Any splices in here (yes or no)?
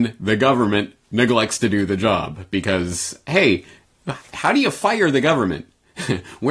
no